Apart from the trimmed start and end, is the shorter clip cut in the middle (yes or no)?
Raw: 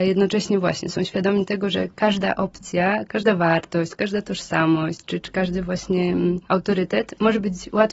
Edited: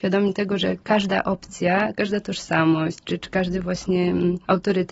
yes